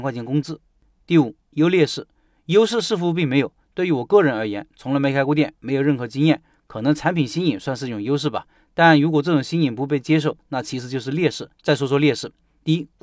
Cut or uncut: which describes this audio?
cut